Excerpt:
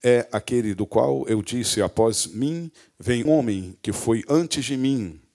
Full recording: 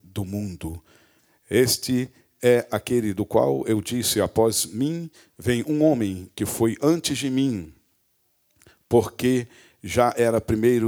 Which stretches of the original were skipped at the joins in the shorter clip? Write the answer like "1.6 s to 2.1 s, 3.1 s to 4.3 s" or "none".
5.6 s to 5.8 s